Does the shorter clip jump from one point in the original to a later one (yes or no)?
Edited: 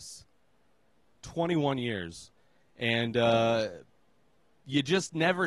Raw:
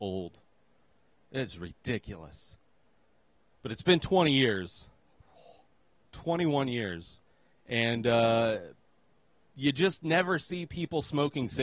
yes